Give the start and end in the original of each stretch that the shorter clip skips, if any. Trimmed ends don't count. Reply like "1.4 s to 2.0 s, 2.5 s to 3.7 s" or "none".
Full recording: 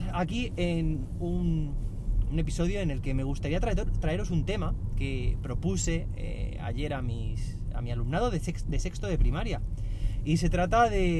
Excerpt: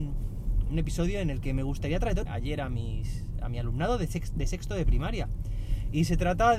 3.9 s to 6.6 s